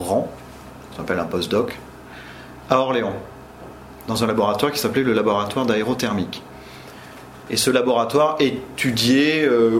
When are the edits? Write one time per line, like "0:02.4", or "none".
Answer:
none